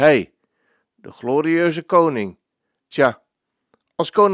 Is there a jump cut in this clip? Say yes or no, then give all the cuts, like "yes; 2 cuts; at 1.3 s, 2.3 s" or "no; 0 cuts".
yes; 1 cut; at 2.8 s